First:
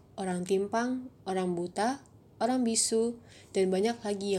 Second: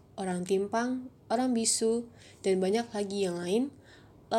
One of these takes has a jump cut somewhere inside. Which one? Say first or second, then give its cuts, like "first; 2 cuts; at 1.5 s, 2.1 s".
second; 1 cut; at 1.2 s